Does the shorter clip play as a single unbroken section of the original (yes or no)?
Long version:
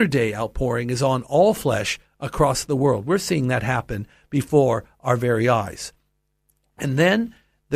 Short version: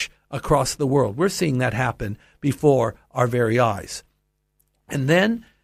yes